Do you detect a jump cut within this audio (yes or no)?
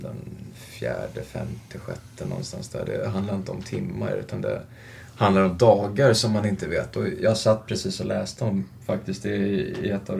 no